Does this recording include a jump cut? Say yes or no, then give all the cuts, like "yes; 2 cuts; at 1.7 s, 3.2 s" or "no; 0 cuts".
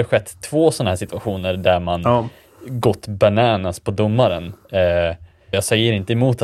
yes; 1 cut; at 5.5 s